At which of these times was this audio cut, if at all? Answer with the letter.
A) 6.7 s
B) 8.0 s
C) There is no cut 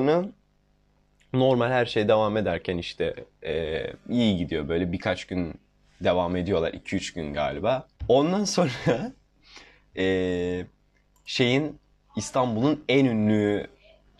B